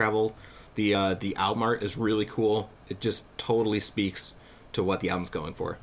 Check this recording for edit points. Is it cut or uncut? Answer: uncut